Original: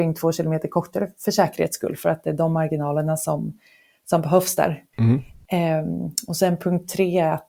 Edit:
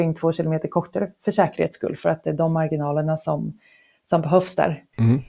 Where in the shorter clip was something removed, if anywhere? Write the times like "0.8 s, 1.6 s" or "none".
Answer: none